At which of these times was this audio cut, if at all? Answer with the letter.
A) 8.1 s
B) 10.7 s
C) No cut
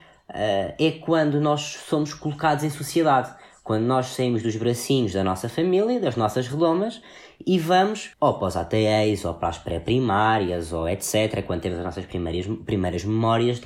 A